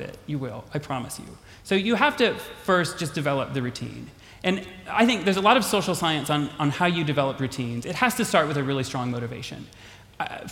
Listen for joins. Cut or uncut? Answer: uncut